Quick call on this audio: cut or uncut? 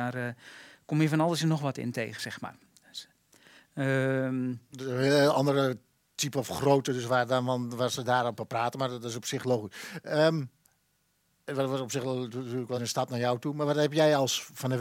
cut